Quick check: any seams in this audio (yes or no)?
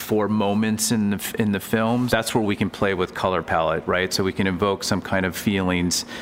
yes